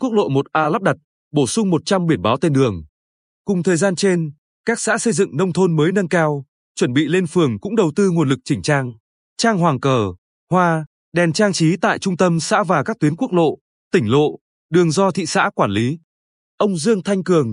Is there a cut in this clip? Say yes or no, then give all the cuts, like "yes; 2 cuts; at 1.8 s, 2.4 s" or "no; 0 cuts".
no; 0 cuts